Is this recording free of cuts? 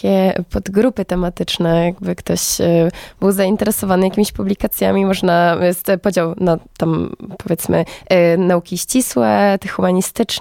yes; 0 cuts

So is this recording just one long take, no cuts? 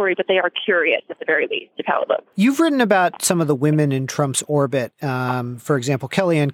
no; 1 cut; at 2.3 s

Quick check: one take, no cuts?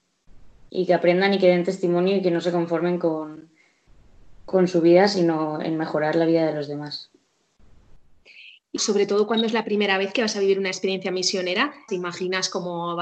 no; 2 cuts; at 8.8 s, 11.9 s

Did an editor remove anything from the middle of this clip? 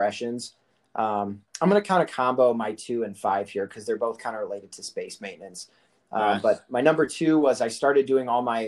no; 0 cuts

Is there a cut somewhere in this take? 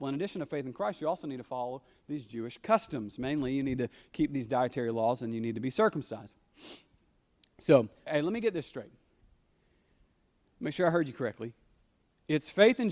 yes; 1 cut; at 8.1 s

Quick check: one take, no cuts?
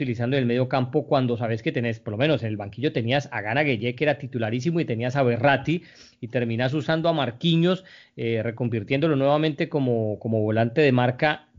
yes; 0 cuts

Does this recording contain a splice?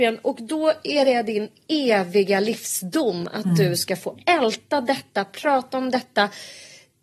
no; 0 cuts

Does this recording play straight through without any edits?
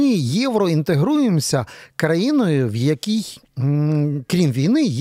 yes; 0 cuts

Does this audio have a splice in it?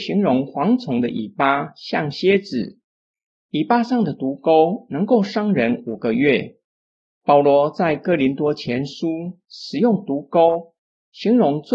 no; 0 cuts

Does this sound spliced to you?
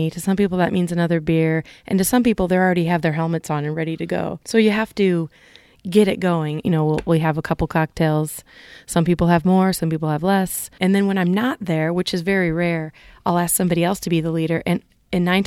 yes; 3 cuts; at 4.4 s, 6.6 s, 10.8 s

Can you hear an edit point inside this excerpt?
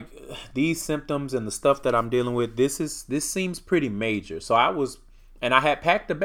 no; 0 cuts

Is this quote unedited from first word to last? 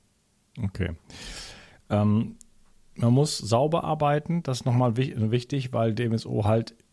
yes; 0 cuts

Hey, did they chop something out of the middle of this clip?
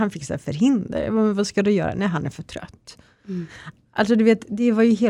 no; 0 cuts

